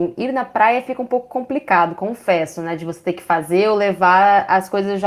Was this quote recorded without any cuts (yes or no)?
yes